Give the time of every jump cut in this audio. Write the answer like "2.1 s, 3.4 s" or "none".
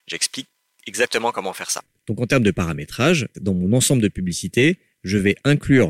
2.0 s, 3.3 s